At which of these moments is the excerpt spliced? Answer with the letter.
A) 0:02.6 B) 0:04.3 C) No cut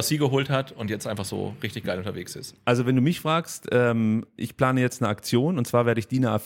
C